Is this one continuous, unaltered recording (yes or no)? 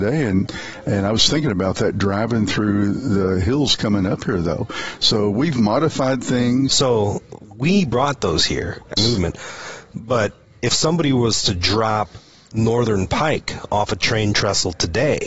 no